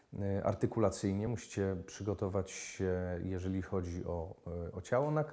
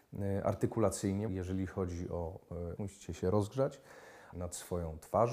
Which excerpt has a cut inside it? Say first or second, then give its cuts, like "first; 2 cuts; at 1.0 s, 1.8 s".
second; 3 cuts; at 1.3 s, 2.8 s, 4.3 s